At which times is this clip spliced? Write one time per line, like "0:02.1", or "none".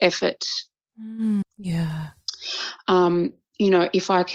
0:01.4